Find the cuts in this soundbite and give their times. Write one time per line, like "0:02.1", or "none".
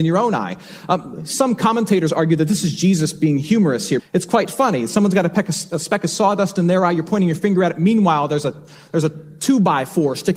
0:04.0